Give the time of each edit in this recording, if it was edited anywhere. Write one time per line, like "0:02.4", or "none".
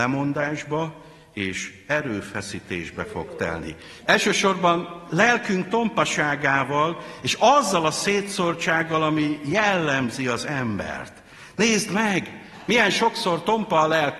0:04.0